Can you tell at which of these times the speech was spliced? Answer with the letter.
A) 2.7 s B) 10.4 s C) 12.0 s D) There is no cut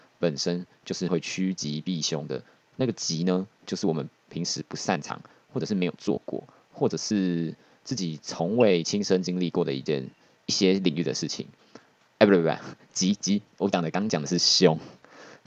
D